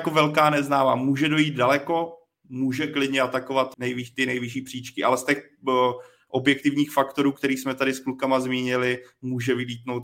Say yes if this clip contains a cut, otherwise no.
yes